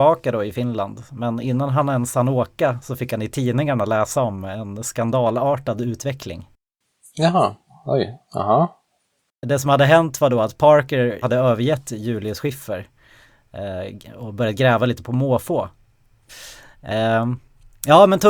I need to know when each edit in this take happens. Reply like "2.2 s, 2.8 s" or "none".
11.2 s, 16.3 s

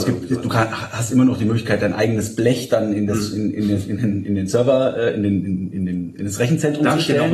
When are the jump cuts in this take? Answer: none

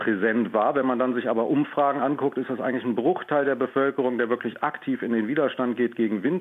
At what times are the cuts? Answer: none

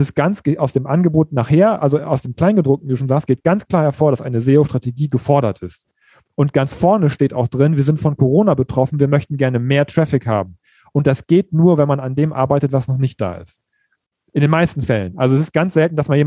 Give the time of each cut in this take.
none

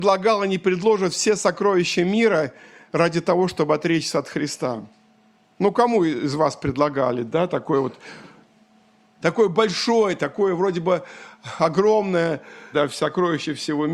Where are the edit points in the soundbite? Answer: 10.2 s, 12.7 s

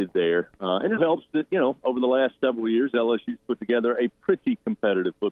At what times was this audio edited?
1.0 s

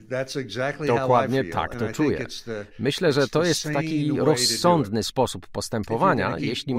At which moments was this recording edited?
none

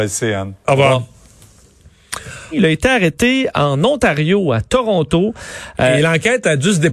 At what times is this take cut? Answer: 2.5 s

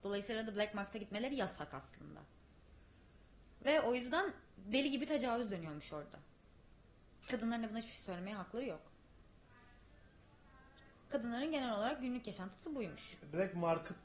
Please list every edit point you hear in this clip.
7.2 s, 10.9 s

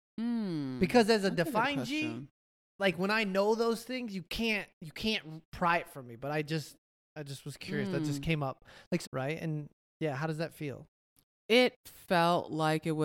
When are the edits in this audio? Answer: 9.0 s

